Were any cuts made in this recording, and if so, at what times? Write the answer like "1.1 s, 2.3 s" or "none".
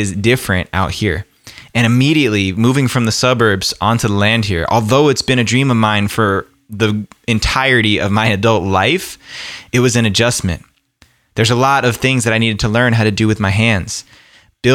none